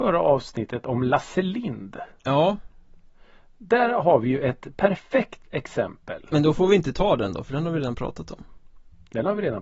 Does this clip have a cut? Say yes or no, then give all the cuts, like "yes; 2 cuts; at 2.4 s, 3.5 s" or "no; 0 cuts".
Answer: no; 0 cuts